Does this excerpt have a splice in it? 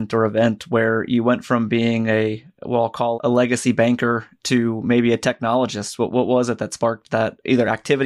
yes; 1 cut; at 3.1 s

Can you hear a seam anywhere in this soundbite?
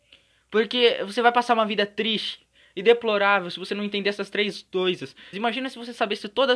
yes; 1 cut; at 5.3 s

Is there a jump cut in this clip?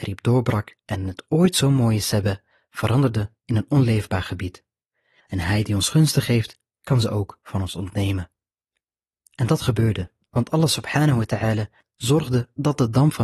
yes; 1 cut; at 5.2 s

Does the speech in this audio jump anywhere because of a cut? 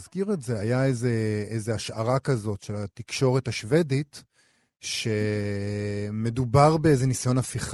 no; 0 cuts

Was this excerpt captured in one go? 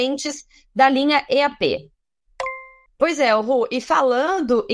no; 1 cut; at 2.9 s

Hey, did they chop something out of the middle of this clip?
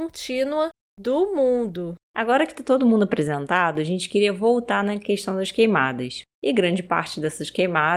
yes; 2 cuts; at 2.1 s, 6.2 s

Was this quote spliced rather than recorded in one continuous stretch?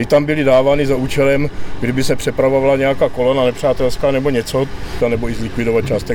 yes; 1 cut; at 5.0 s

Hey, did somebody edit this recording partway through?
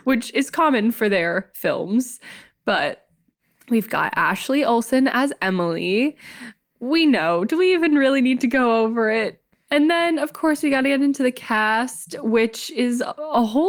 yes; 1 cut; at 9.5 s

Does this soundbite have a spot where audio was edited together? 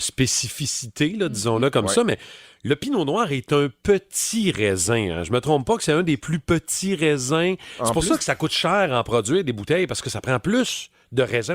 no; 0 cuts

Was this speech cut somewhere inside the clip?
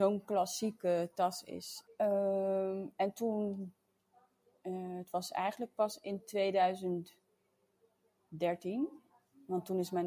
yes; 1 cut; at 1.9 s

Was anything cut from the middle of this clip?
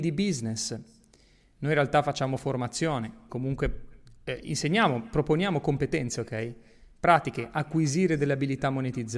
yes; 1 cut; at 3.3 s

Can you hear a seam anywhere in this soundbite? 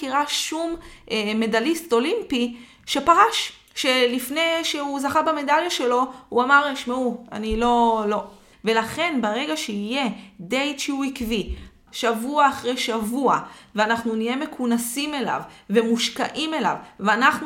yes; 3 cuts; at 3.7 s, 8.5 s, 11.9 s

